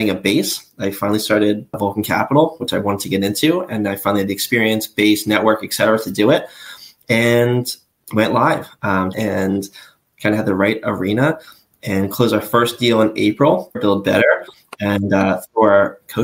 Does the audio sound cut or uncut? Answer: cut